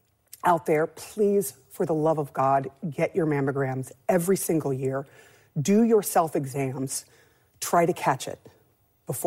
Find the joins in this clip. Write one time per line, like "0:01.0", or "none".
none